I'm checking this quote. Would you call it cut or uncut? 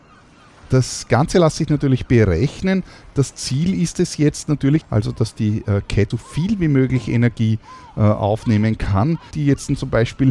cut